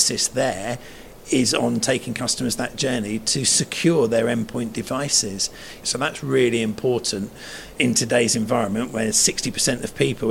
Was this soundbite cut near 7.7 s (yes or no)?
yes